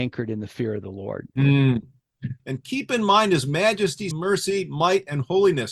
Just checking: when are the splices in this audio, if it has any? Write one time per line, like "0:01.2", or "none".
0:02.4
0:04.1